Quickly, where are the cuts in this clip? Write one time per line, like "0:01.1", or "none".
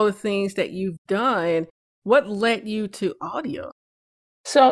none